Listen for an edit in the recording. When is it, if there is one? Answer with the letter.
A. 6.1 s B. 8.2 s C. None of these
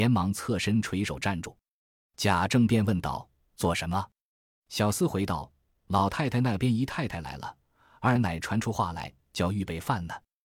B